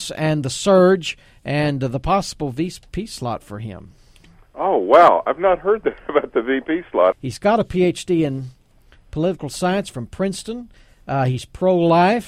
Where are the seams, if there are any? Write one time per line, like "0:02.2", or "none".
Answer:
0:07.1